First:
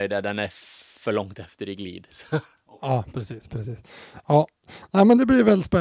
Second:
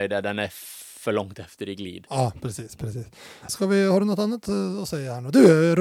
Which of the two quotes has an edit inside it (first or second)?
second